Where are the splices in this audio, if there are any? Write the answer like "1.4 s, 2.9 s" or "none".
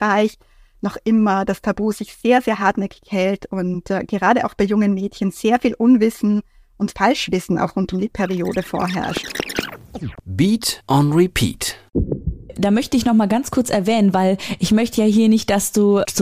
none